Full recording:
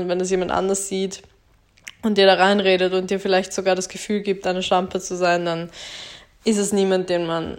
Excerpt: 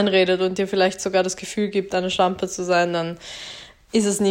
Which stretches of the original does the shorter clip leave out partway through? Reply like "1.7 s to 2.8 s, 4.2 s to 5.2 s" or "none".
none